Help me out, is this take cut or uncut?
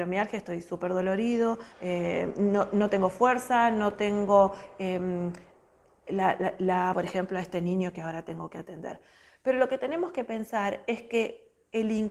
cut